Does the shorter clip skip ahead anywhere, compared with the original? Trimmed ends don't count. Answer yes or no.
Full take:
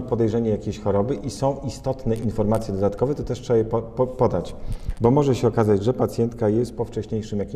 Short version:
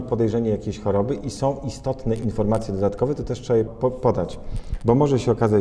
yes